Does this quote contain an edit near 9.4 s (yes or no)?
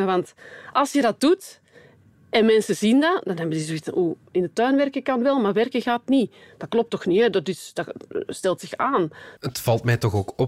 yes